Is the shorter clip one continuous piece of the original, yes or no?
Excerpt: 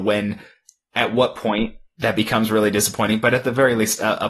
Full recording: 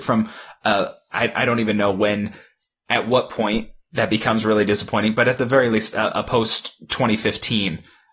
yes